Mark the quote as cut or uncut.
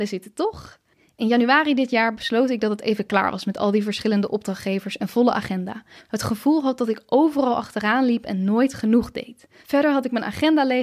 cut